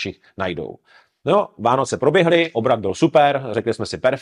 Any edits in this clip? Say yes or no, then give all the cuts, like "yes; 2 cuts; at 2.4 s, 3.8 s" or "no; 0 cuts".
no; 0 cuts